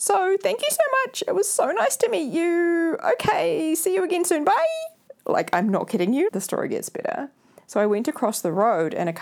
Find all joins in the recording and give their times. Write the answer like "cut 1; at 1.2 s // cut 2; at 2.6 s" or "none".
cut 1; at 6.3 s